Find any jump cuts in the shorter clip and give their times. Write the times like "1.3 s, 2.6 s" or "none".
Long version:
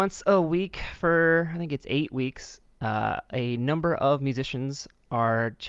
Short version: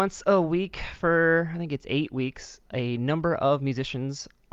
2.7 s